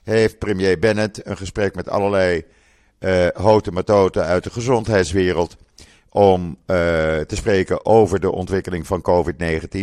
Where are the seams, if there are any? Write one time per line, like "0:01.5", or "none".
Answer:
none